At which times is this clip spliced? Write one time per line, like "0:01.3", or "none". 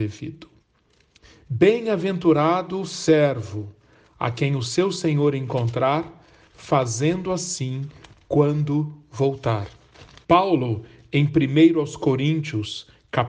0:10.2